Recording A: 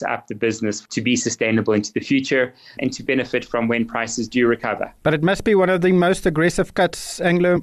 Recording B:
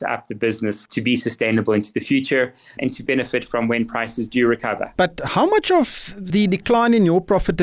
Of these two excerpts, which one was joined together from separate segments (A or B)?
B